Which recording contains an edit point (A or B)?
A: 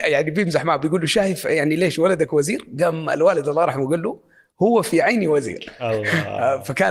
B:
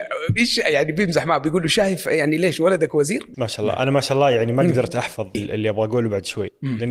B